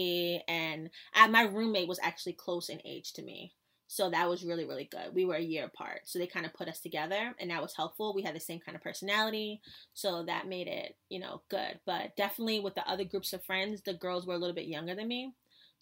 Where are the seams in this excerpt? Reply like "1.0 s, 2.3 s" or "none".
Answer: none